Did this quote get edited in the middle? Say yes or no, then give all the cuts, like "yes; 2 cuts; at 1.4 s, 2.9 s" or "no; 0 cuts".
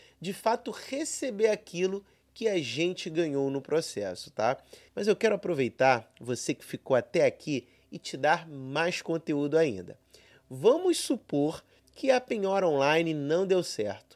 yes; 1 cut; at 4.9 s